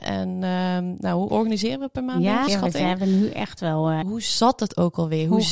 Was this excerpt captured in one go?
no; 3 cuts; at 1.3 s, 2.5 s, 4.0 s

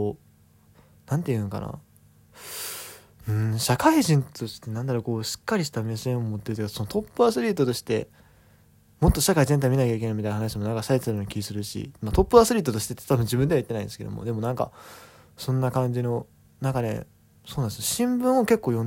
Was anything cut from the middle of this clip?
no; 0 cuts

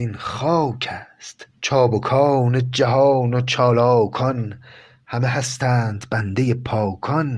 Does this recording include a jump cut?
yes; 1 cut; at 1.5 s

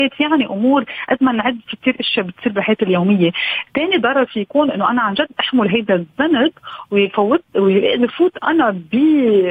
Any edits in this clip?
no; 0 cuts

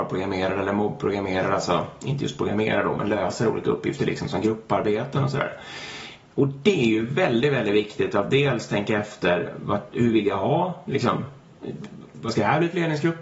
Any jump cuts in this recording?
no; 0 cuts

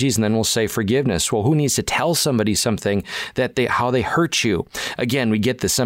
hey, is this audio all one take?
yes; 0 cuts

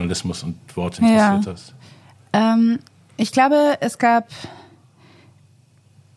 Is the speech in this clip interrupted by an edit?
no; 0 cuts

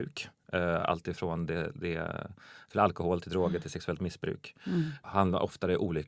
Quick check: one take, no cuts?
yes; 0 cuts

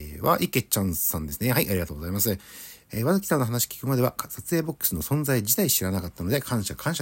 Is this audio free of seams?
no; 1 cut; at 2.8 s

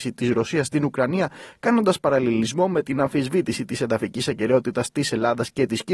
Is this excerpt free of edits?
yes; 0 cuts

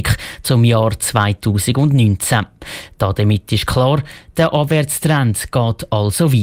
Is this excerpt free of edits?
yes; 0 cuts

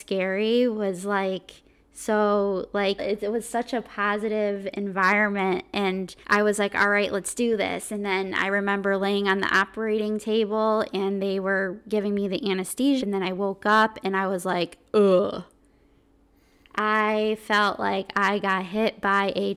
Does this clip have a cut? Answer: yes; 3 cuts; at 3.0 s, 6.2 s, 13.0 s

